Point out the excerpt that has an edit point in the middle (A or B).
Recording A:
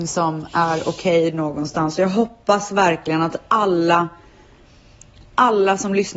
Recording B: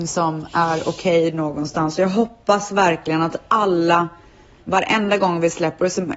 B